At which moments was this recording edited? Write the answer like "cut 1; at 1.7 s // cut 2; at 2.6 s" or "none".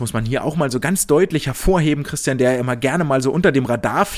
none